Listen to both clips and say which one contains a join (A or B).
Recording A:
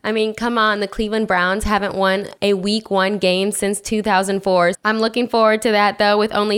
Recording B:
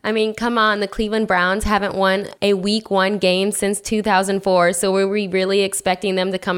A